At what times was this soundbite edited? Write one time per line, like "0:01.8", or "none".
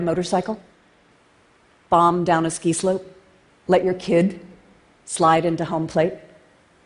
0:03.5